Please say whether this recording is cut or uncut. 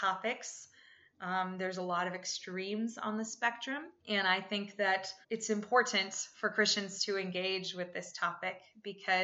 cut